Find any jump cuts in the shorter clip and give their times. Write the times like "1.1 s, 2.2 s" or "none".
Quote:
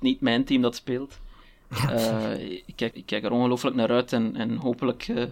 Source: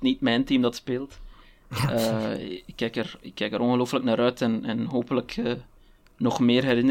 2.9 s